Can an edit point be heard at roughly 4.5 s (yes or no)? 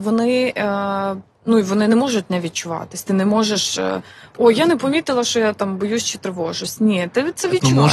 no